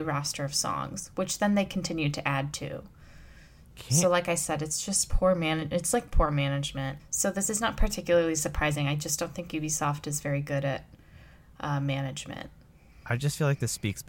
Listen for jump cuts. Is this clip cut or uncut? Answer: cut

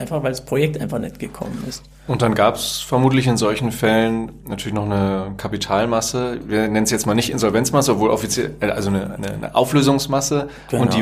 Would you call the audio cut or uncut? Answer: uncut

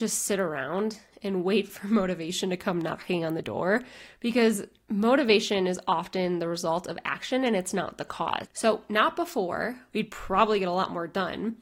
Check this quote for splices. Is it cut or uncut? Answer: cut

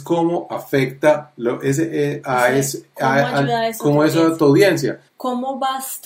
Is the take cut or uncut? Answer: cut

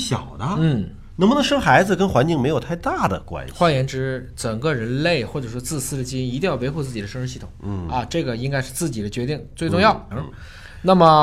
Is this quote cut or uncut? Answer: cut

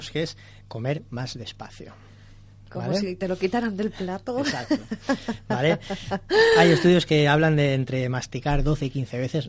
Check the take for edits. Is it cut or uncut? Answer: uncut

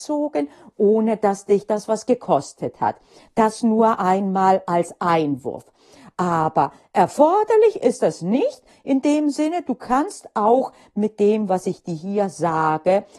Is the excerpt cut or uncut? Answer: uncut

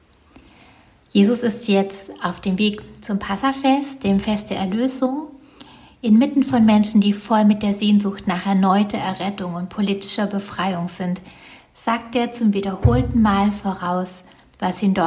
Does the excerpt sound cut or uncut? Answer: uncut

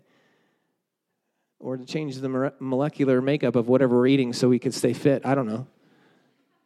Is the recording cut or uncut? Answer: uncut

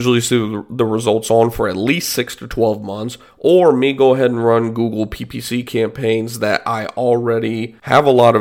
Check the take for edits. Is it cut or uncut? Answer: uncut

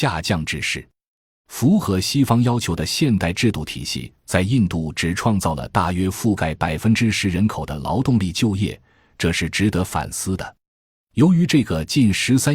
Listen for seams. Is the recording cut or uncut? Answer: uncut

